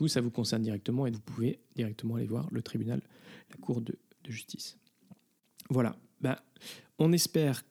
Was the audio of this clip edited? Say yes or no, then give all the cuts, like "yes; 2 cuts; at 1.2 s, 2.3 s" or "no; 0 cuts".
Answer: yes; 1 cut; at 1.1 s